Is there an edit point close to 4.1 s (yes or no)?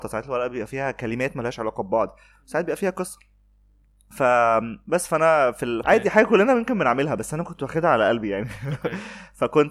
no